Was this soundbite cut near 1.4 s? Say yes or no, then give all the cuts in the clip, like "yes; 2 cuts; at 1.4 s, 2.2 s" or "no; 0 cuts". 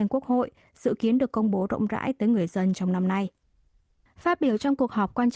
no; 1 cut; at 4.1 s